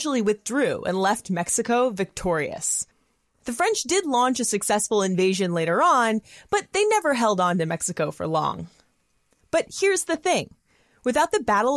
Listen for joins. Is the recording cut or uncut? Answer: uncut